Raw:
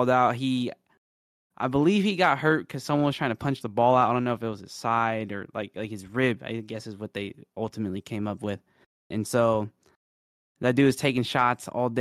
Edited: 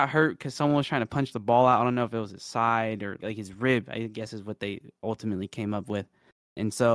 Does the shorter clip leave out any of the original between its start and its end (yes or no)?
yes